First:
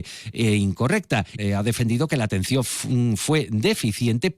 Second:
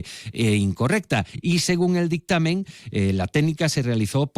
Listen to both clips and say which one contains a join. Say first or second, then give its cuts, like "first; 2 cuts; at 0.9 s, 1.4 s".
first; 1 cut; at 1.4 s